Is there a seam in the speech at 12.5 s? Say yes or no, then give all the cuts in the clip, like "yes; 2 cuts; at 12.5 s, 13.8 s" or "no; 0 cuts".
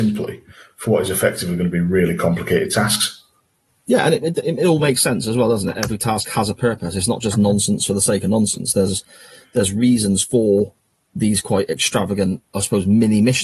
yes; 1 cut; at 12.5 s